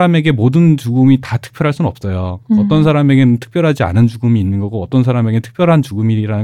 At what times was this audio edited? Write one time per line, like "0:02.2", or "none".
none